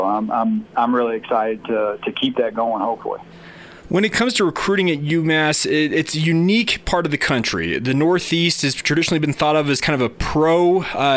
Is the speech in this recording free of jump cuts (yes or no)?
no